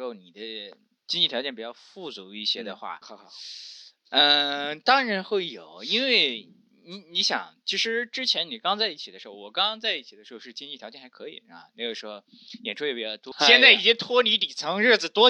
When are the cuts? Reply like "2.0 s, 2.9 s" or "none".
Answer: 3.0 s, 13.3 s